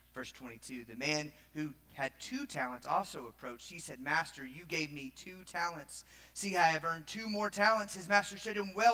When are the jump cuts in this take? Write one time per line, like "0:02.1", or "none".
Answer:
none